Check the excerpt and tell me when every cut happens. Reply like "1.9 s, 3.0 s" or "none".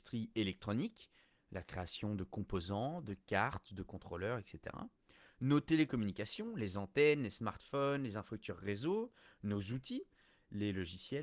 none